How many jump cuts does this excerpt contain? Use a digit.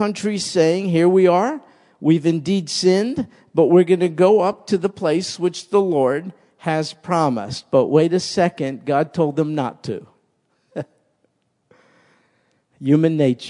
0